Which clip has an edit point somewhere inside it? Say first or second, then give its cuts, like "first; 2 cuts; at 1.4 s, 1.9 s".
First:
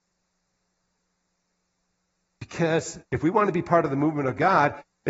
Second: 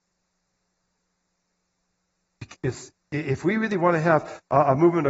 second; 1 cut; at 2.5 s